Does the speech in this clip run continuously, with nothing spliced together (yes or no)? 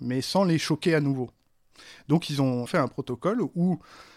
yes